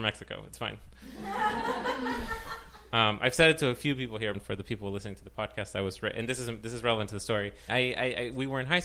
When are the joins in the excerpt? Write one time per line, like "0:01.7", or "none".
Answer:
0:04.3
0:07.7